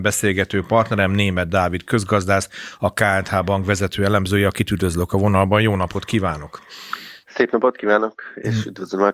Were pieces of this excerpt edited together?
no; 0 cuts

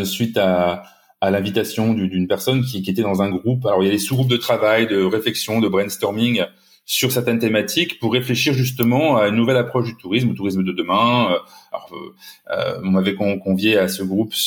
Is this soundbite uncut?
yes; 0 cuts

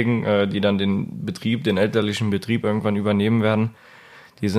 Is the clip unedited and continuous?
yes; 0 cuts

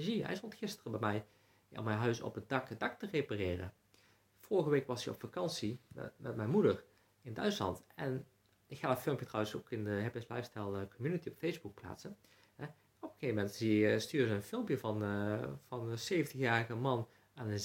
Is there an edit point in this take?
no; 0 cuts

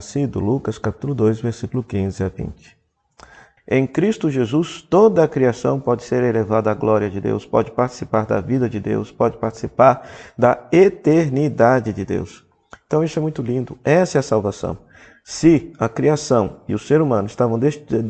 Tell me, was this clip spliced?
yes; 1 cut; at 3.6 s

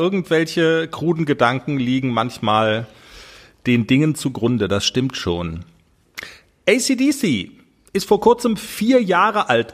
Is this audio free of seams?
yes; 0 cuts

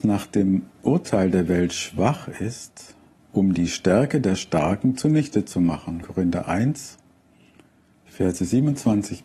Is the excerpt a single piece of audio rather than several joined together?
no; 2 cuts; at 3.1 s, 6.0 s

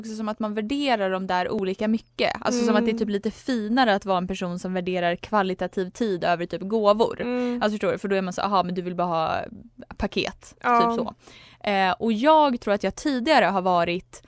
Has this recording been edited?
no; 0 cuts

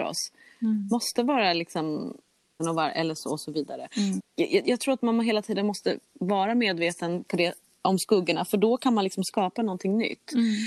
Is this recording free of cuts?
no; 2 cuts; at 2.6 s, 4.2 s

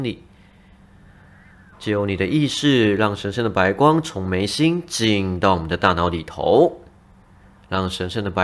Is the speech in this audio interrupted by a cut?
yes; 1 cut; at 1.7 s

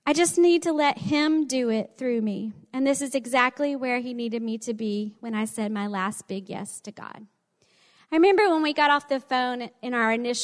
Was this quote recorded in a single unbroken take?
yes; 0 cuts

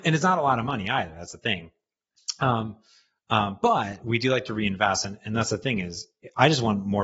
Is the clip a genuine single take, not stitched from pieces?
yes; 0 cuts

